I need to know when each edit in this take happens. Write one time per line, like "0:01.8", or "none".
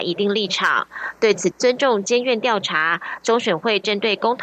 0:01.5